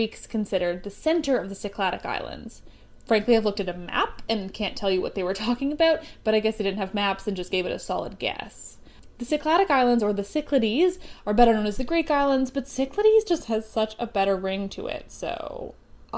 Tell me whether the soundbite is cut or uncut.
uncut